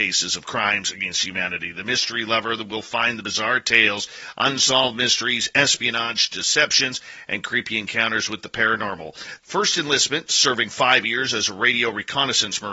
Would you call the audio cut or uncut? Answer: cut